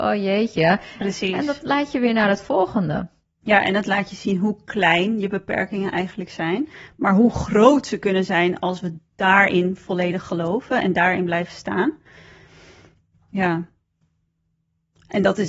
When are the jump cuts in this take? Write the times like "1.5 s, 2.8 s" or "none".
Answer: 1.0 s